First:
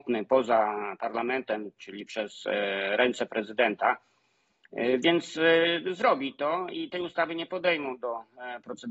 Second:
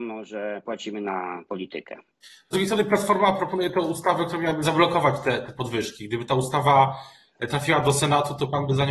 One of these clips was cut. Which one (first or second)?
second